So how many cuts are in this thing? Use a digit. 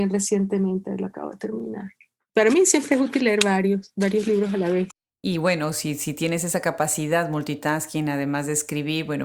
0